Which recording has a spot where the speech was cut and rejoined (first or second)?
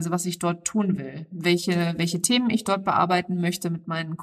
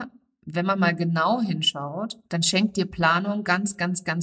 second